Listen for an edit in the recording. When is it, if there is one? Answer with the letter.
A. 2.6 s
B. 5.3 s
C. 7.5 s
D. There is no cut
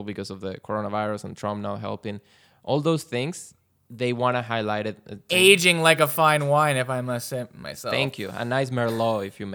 B